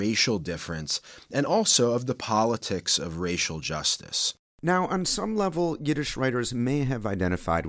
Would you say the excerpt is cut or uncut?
uncut